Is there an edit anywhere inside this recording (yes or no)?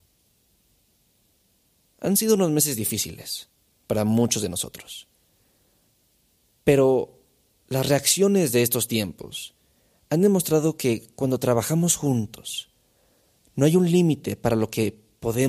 no